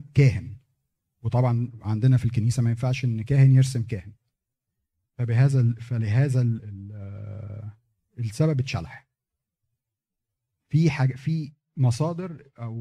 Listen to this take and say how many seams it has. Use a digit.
1